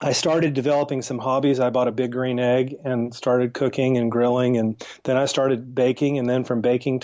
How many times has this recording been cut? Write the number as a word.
zero